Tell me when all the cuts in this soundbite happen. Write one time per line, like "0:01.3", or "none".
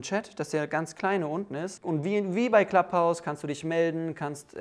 0:01.8